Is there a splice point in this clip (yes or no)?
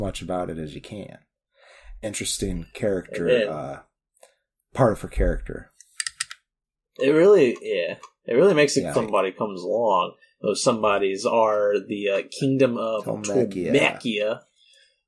yes